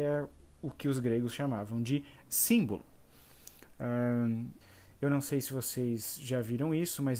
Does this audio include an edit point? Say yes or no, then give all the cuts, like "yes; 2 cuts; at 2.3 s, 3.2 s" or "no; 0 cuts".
yes; 1 cut; at 4.6 s